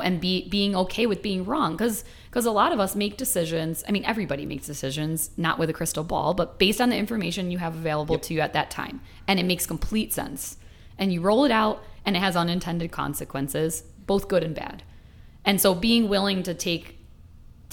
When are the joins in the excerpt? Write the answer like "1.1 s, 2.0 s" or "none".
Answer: none